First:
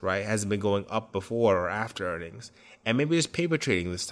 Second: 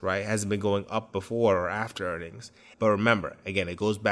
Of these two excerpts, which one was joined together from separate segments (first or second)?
second